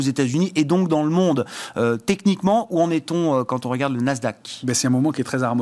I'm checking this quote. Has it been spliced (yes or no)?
no